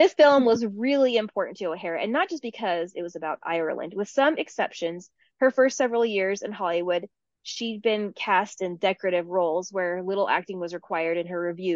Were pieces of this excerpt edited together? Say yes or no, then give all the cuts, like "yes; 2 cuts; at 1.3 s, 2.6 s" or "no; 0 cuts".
no; 0 cuts